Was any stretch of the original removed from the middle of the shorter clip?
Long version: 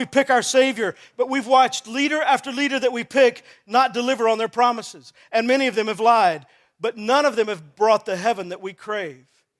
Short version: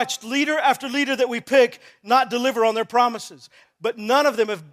yes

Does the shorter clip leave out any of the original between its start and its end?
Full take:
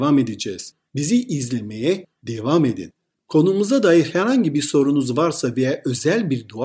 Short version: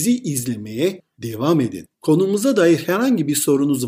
yes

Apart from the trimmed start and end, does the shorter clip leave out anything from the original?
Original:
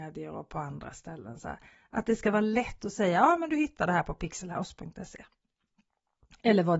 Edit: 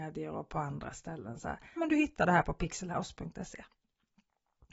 yes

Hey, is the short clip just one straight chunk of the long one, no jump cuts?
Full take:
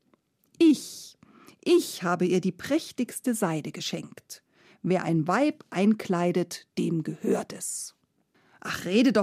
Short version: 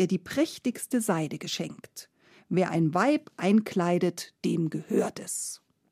yes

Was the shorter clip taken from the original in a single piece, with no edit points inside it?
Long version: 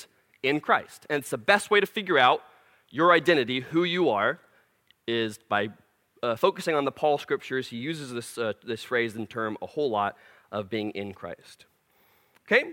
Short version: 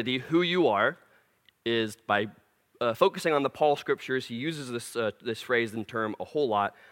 yes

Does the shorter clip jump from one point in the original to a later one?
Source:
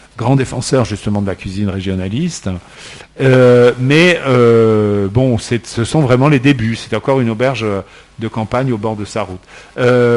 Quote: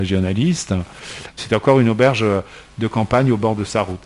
yes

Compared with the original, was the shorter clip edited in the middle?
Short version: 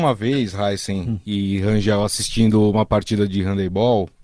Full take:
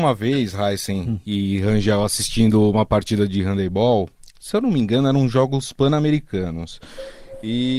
no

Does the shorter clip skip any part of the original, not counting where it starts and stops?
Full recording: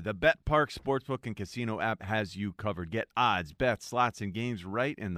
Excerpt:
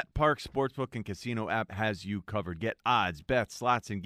no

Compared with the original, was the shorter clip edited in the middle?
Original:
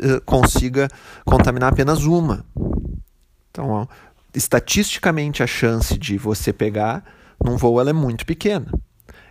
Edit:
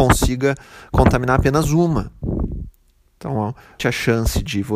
yes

